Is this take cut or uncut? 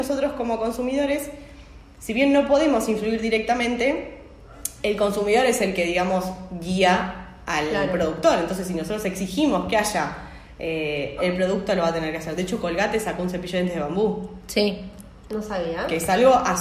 cut